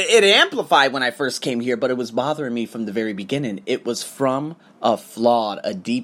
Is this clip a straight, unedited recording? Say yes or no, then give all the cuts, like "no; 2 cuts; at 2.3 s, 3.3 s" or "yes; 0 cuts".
yes; 0 cuts